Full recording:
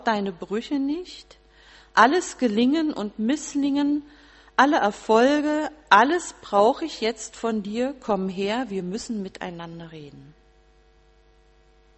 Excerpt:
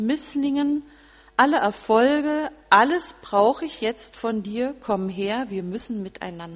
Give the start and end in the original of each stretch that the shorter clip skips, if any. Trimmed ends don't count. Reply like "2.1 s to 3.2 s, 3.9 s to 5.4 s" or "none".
none